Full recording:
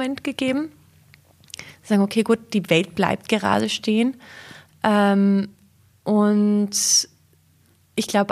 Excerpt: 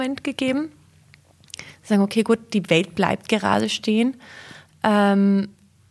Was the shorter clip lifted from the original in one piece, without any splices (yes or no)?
yes